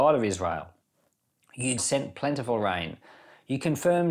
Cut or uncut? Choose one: cut